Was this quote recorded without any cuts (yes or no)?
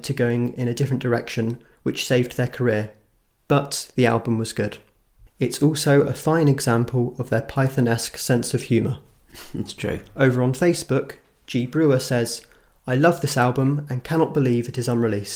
no